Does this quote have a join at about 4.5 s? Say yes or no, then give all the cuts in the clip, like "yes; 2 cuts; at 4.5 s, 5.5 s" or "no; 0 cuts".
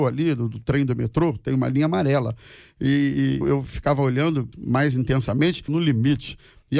yes; 3 cuts; at 3.4 s, 4.5 s, 5.7 s